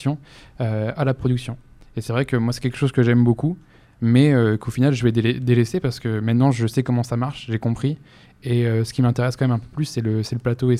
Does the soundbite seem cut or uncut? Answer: uncut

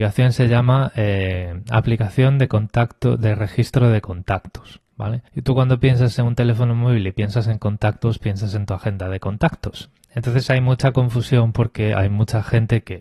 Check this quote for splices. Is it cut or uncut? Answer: cut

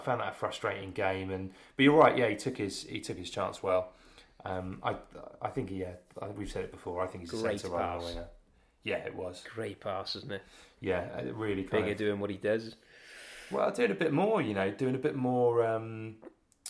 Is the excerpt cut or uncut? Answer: uncut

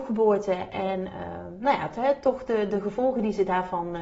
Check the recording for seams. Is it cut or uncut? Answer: uncut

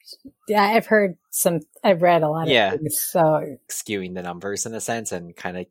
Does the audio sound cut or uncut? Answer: cut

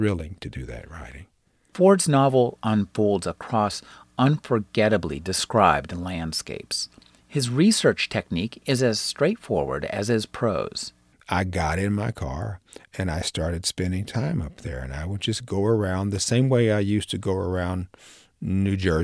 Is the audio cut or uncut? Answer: uncut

